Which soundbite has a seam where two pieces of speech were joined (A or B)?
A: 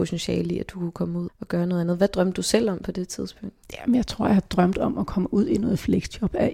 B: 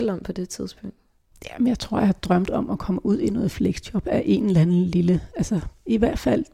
A